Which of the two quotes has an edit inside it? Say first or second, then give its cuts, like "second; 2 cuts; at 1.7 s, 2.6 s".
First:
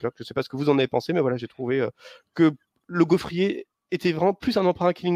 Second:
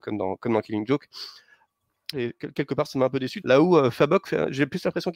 second; 2 cuts; at 2.1 s, 3.4 s